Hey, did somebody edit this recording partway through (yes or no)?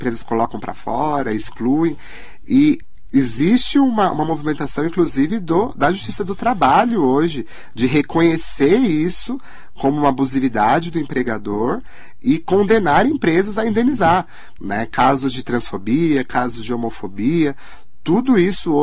no